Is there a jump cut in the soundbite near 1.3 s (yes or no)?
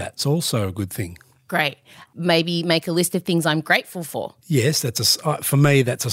no